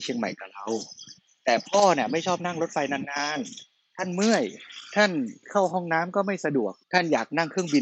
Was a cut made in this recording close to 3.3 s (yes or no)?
no